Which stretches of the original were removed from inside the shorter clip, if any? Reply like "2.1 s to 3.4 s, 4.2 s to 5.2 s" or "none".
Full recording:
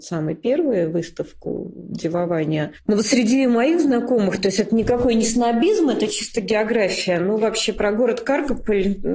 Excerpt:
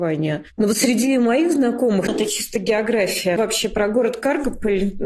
4.4 s to 5.9 s, 7.2 s to 7.4 s